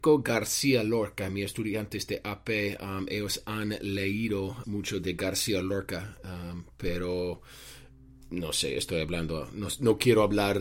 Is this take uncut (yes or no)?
no